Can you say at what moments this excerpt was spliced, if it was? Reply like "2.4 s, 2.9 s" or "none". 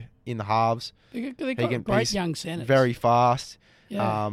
none